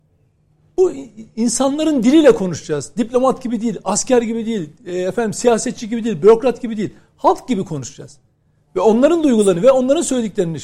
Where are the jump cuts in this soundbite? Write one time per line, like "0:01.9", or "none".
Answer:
none